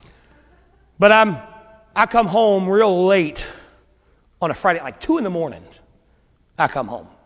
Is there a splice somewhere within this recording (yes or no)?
no